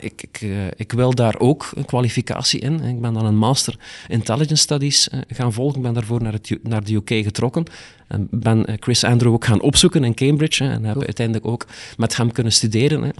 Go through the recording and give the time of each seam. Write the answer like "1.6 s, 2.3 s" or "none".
none